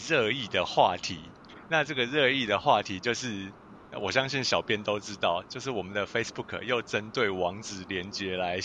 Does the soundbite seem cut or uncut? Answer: uncut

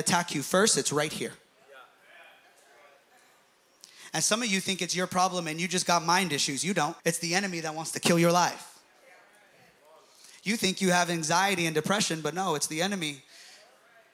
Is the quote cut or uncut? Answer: cut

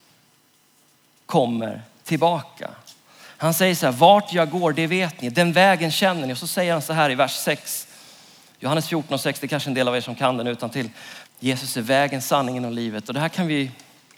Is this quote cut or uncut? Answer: cut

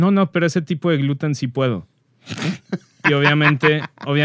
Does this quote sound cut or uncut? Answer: uncut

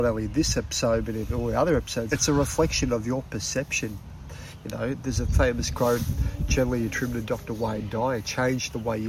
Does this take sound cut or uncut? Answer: cut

